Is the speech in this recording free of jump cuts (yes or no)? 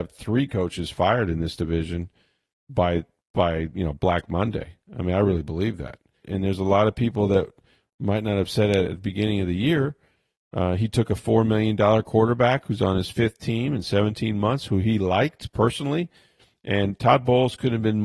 no